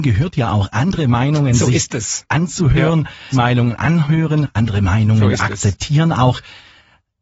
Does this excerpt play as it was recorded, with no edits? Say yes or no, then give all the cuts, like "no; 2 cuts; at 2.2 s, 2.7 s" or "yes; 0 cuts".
no; 1 cut; at 3.3 s